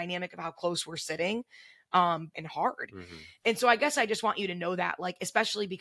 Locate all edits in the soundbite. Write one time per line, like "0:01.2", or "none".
0:02.3

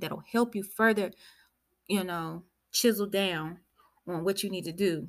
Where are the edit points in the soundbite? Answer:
none

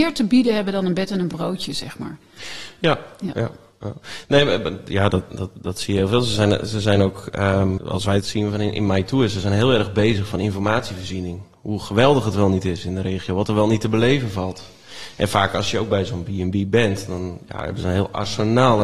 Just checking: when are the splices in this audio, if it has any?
0:07.8

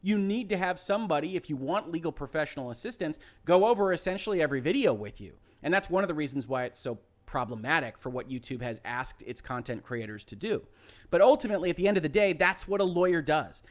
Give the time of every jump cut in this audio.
none

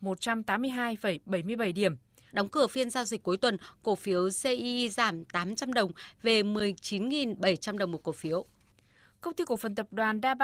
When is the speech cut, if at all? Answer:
0:02.3

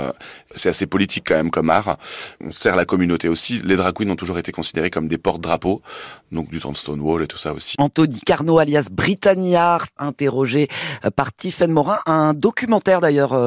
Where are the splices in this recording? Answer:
0:07.7
0:10.0

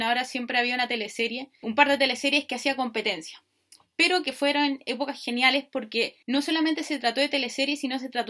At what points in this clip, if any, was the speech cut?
0:01.6
0:06.2

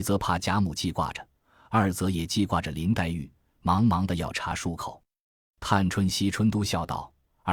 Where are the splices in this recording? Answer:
none

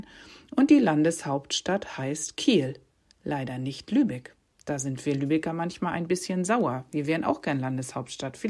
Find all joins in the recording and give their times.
none

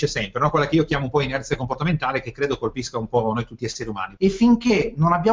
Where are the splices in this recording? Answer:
0:04.2

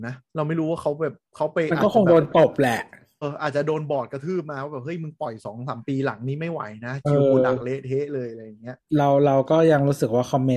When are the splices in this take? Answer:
0:03.2
0:08.9

